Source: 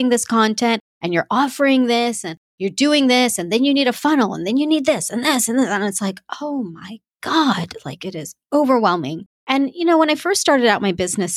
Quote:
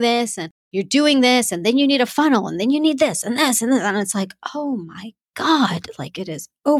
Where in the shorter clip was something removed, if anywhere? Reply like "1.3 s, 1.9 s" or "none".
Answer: none